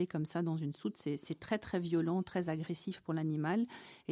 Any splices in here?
no; 0 cuts

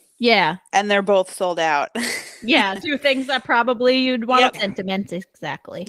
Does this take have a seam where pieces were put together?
yes; 2 cuts; at 2.8 s, 4.5 s

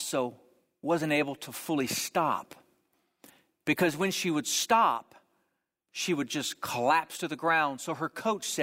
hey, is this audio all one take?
yes; 0 cuts

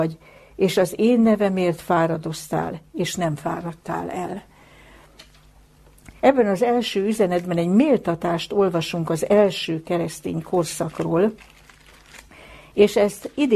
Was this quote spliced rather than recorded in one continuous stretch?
yes; 1 cut; at 6.2 s

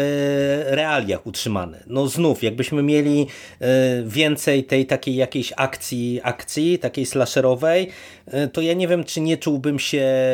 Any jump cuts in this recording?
no; 0 cuts

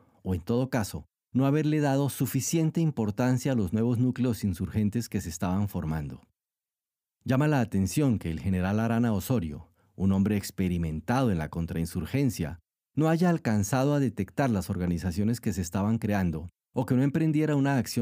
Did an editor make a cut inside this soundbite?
no; 0 cuts

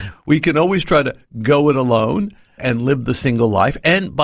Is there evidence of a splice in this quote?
yes; 1 cut; at 2.6 s

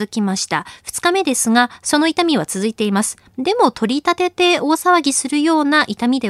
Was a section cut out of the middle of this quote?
no; 0 cuts

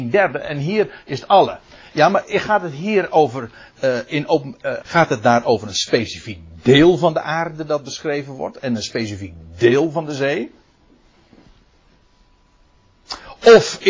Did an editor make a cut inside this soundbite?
yes; 1 cut; at 4.8 s

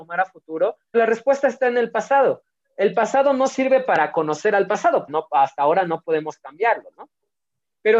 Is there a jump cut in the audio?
yes; 2 cuts; at 0.9 s, 5.1 s

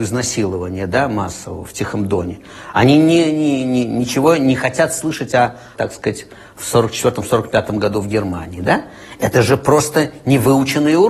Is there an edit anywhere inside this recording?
yes; 1 cut; at 5.7 s

